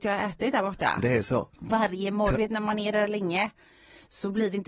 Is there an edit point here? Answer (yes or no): yes